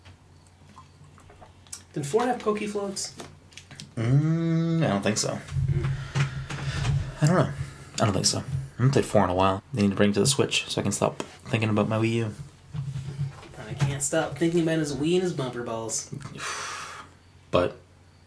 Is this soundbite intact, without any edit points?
no; 2 cuts; at 9.6 s, 11.4 s

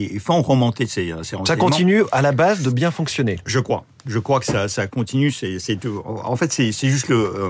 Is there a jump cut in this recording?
no; 0 cuts

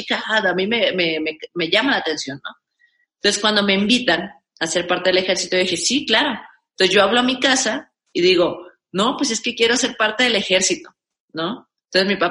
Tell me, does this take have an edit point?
no; 0 cuts

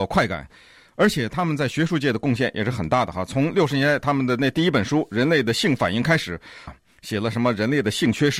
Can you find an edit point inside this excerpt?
yes; 1 cut; at 6.7 s

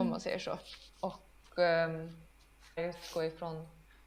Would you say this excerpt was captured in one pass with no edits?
no; 2 cuts; at 0.9 s, 2.8 s

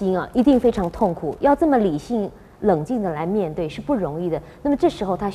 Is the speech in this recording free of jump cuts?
yes; 0 cuts

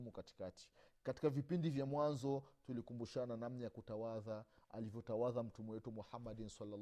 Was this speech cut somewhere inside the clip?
yes; 1 cut; at 1.9 s

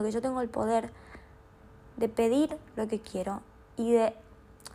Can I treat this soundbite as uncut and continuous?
yes; 0 cuts

